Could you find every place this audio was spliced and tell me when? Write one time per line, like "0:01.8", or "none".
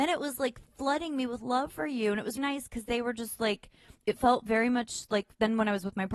0:02.4